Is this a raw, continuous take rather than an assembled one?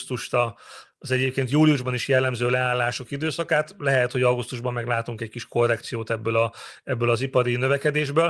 yes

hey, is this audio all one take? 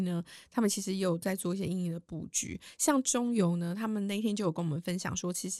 yes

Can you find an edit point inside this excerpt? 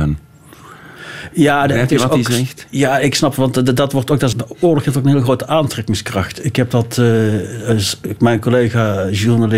yes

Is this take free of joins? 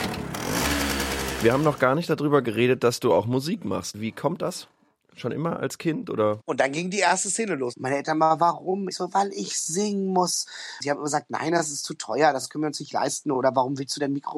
no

